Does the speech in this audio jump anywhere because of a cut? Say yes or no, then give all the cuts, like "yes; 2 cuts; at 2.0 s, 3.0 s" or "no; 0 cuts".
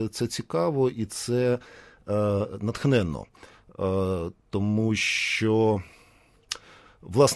no; 0 cuts